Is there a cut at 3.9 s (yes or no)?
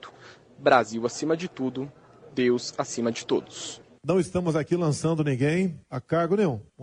no